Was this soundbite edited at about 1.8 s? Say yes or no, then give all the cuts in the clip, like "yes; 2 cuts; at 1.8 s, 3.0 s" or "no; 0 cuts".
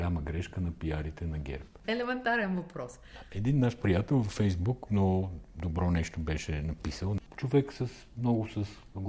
yes; 1 cut; at 1.8 s